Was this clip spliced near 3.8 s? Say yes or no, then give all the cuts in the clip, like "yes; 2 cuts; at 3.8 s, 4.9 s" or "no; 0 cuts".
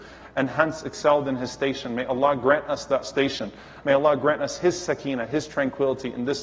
yes; 1 cut; at 3.8 s